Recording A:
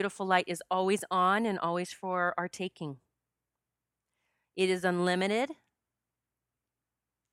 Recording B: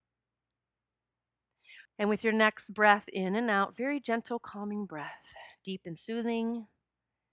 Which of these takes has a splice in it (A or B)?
B